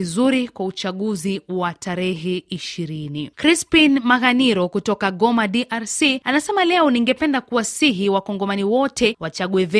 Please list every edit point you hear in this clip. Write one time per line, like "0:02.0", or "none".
none